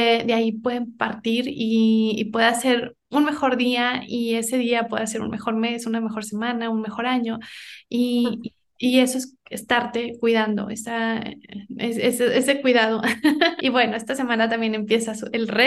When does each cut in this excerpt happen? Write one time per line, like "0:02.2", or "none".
0:13.6